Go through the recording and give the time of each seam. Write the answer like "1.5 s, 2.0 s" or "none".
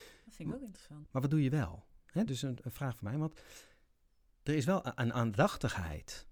1.0 s, 2.3 s